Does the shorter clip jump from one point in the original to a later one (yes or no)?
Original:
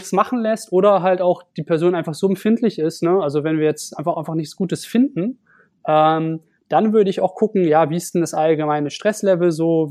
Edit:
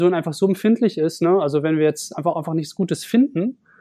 no